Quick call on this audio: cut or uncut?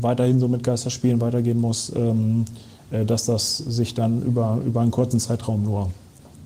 uncut